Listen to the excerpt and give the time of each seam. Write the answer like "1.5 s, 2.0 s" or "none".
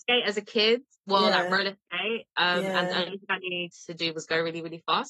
none